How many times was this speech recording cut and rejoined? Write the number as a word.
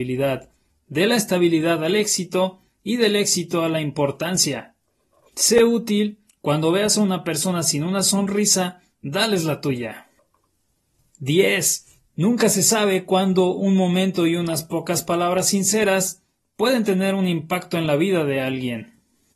one